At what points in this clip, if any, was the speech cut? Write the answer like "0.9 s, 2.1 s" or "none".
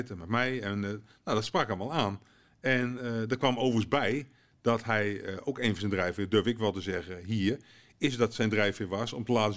none